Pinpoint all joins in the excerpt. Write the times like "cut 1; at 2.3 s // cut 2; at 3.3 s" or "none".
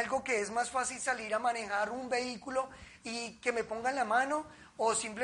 none

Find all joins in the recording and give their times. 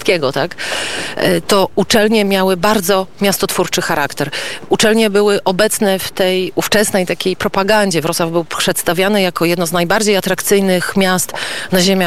cut 1; at 1.4 s

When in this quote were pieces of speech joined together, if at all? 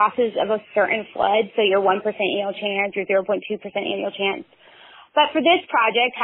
none

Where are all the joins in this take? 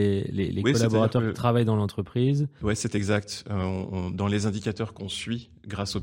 none

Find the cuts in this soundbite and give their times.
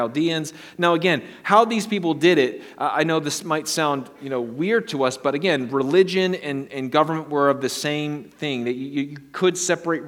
none

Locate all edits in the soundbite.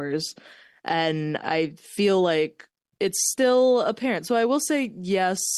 cut 1; at 1.4 s

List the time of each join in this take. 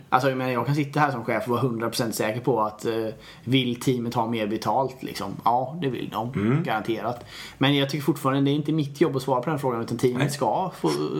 none

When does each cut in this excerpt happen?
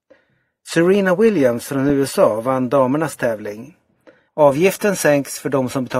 cut 1; at 4.3 s

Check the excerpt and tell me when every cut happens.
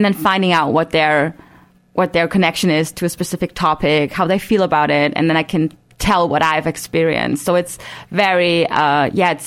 none

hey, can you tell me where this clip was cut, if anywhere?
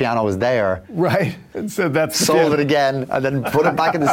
cut 1; at 1.5 s

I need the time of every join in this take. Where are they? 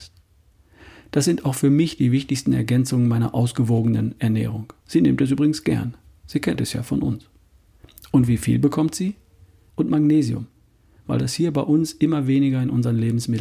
cut 1; at 4.8 s // cut 2; at 9.7 s

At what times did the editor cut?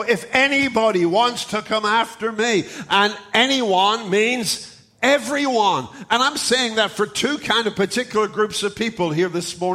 none

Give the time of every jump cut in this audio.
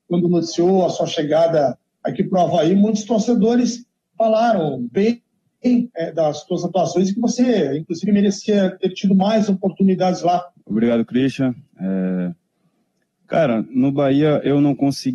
cut 1; at 10.5 s

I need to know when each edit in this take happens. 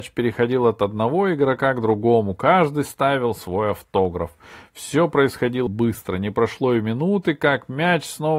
cut 1; at 5.7 s

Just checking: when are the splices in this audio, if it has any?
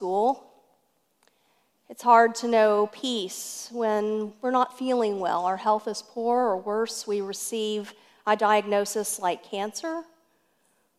none

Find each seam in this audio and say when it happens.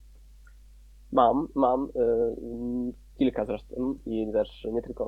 none

